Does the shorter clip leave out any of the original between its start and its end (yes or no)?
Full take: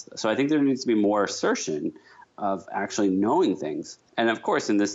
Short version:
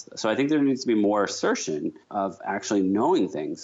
yes